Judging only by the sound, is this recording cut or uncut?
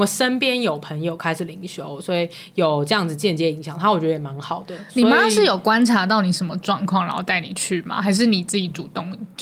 uncut